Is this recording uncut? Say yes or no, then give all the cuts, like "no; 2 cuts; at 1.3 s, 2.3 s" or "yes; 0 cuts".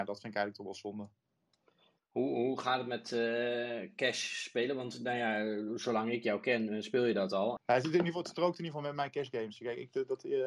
no; 1 cut; at 7.6 s